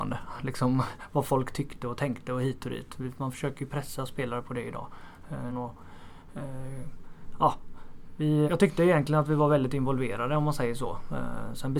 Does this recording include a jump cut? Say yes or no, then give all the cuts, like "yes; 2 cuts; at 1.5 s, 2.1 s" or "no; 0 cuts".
yes; 2 cuts; at 5.5 s, 8.5 s